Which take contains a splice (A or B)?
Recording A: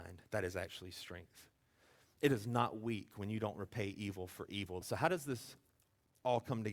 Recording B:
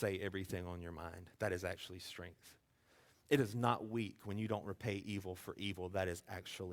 A